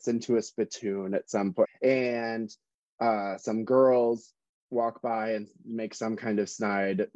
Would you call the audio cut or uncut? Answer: cut